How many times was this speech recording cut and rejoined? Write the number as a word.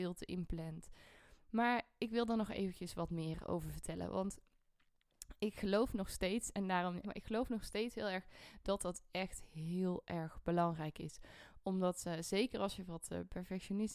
two